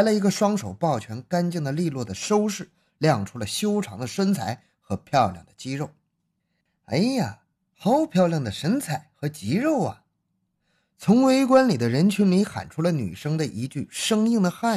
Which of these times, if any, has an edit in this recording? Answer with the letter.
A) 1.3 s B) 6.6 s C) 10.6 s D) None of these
D